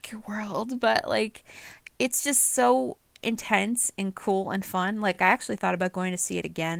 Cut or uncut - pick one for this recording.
uncut